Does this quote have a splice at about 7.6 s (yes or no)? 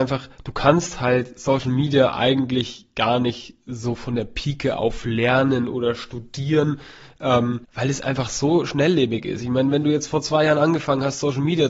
yes